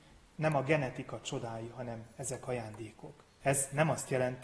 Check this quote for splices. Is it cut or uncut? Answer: cut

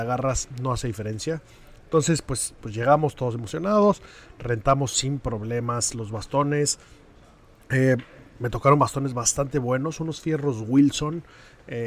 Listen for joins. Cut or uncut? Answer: uncut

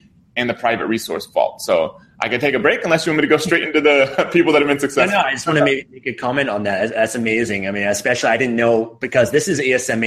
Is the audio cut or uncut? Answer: uncut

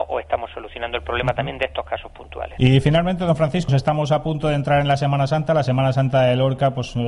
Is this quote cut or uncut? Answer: cut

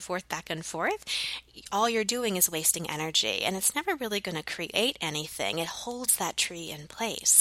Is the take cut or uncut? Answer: uncut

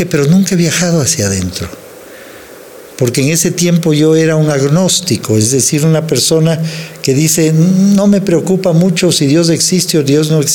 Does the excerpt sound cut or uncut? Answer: uncut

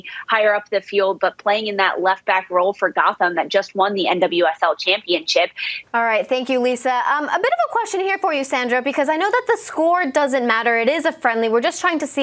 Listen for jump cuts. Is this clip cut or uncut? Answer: cut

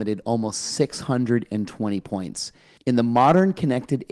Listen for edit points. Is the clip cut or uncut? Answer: cut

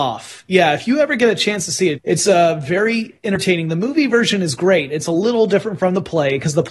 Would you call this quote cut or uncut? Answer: cut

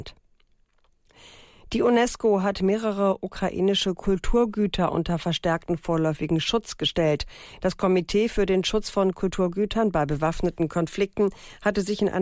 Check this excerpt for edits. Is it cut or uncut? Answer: uncut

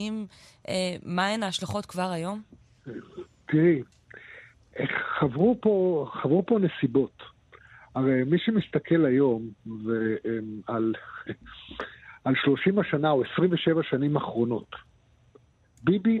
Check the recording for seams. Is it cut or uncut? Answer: uncut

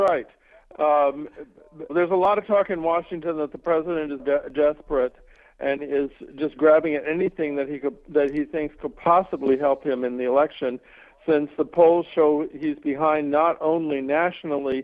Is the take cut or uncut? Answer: cut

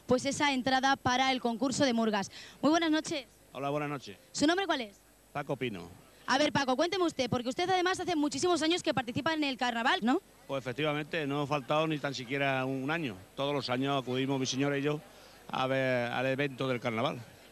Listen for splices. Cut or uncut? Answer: cut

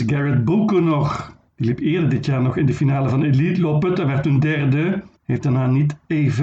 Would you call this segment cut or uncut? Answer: cut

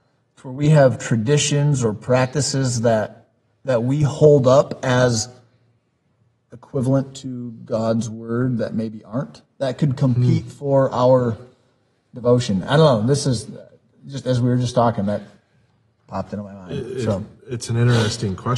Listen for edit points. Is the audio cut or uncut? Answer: uncut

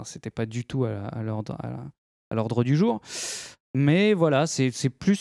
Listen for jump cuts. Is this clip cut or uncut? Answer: uncut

